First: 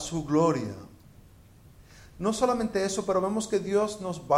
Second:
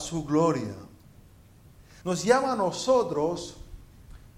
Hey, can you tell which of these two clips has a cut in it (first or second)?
second